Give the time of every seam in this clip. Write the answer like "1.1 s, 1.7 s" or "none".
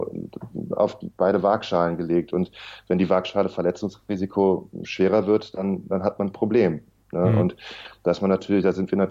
none